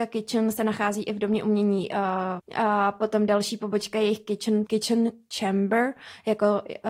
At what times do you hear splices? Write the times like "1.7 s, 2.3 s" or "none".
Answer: 2.4 s, 4.6 s